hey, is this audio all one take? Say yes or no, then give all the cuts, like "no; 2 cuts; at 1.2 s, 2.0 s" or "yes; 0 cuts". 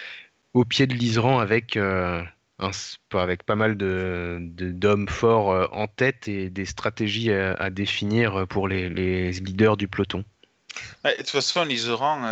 yes; 0 cuts